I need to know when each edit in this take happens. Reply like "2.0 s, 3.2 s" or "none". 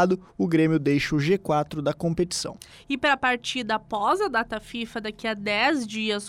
none